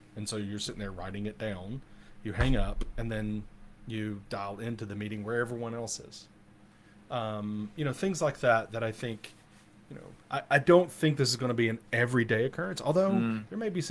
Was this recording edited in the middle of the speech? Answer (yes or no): no